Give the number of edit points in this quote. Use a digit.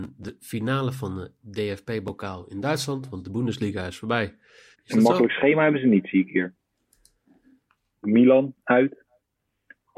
2